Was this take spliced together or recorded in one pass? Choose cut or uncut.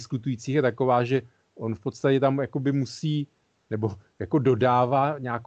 uncut